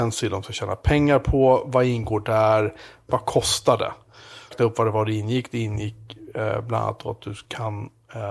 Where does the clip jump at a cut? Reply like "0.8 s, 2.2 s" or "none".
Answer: 4.5 s